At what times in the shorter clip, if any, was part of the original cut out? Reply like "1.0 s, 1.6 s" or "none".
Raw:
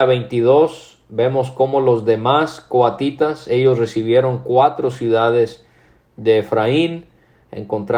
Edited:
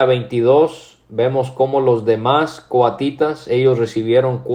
none